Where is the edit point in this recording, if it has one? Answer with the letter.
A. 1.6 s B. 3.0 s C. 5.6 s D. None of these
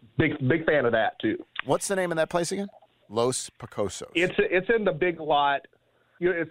B